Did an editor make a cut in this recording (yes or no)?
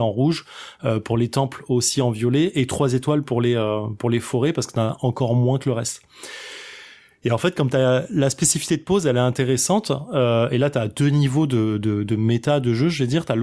no